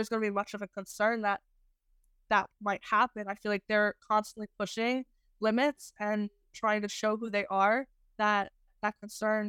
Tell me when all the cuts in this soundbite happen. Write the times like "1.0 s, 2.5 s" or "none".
none